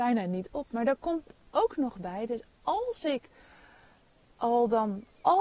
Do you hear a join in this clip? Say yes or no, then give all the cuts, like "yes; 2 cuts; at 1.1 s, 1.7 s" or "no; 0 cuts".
no; 0 cuts